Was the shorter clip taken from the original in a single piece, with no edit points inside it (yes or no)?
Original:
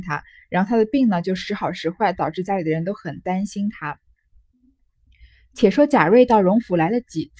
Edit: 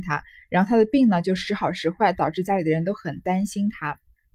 yes